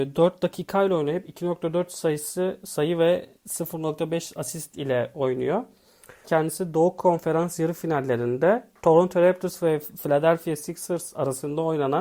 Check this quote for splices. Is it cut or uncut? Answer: cut